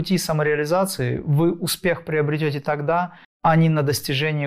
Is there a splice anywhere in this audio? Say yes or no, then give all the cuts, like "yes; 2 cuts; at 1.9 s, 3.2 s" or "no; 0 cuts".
yes; 1 cut; at 3.2 s